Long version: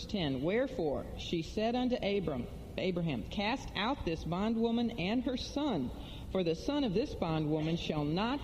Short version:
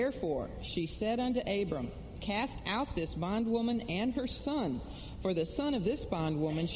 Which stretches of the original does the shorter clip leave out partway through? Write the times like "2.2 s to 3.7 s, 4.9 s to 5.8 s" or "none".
2.7 s to 3.3 s